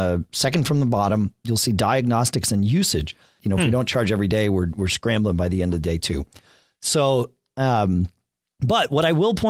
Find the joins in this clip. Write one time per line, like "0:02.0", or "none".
0:03.4